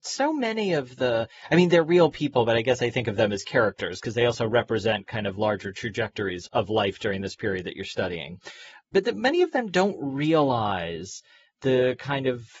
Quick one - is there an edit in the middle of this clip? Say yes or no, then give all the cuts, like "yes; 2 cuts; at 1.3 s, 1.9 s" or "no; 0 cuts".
no; 0 cuts